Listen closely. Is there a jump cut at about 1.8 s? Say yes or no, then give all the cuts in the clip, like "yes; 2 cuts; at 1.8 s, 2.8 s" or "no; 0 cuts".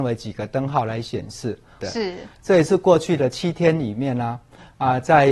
yes; 1 cut; at 1.8 s